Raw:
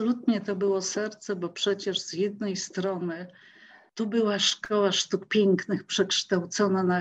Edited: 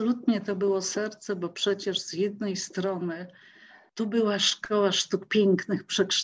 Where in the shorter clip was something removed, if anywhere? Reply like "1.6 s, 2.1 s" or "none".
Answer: none